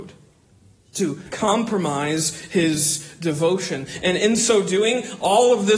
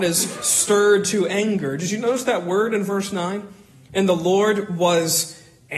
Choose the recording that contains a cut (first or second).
first